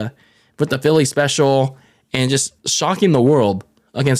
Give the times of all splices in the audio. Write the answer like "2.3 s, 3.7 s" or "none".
2.6 s